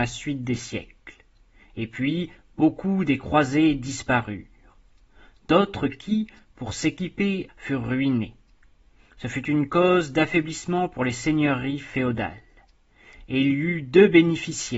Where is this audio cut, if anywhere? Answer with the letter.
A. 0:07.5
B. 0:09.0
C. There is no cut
A